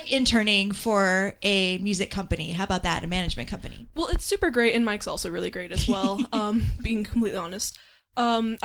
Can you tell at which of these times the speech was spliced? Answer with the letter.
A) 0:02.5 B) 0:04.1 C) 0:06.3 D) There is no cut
D